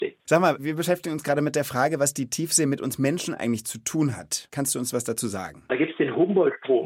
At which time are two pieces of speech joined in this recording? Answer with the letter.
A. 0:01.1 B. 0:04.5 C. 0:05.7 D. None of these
C